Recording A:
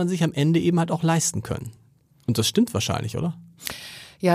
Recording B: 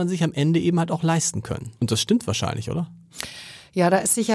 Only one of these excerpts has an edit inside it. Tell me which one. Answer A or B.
B